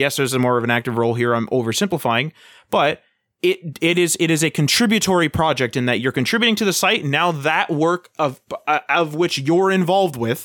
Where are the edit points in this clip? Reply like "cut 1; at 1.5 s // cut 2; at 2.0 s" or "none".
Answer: none